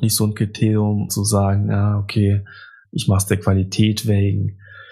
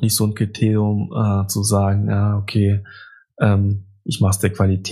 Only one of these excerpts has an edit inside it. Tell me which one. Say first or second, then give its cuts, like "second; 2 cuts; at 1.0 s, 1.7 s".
first; 2 cuts; at 1.1 s, 2.8 s